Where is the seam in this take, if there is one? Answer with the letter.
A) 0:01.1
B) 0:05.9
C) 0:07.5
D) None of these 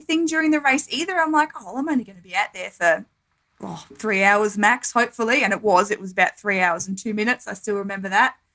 D